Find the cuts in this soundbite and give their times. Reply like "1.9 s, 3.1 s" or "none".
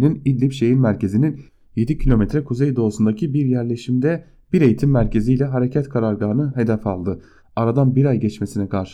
7.4 s